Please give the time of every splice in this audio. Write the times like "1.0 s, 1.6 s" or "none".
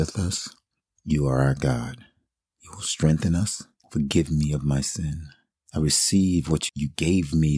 3.8 s, 6.7 s